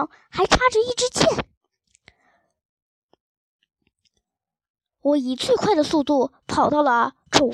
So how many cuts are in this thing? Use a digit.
0